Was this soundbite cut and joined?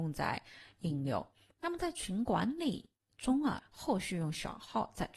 yes; 1 cut; at 3.6 s

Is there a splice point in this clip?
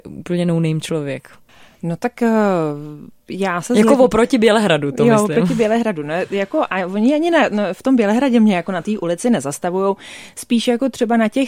no; 0 cuts

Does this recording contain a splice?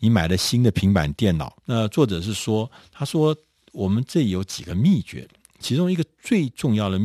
yes; 1 cut; at 1.6 s

